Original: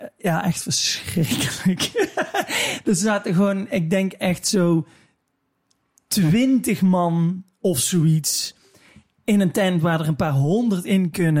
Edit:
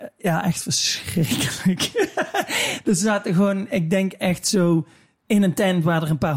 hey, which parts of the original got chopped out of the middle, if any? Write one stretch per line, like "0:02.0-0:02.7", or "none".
0:05.2-0:09.2